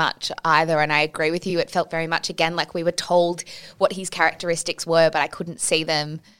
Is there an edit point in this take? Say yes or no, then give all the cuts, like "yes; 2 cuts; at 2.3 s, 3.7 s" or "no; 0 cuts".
no; 0 cuts